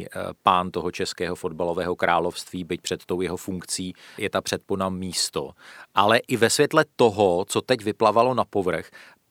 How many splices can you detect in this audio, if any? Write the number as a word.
one